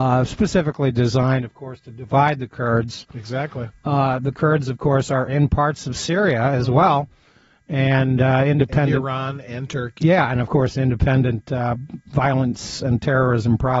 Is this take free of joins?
yes; 0 cuts

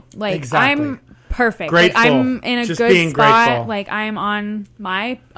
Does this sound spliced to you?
no; 0 cuts

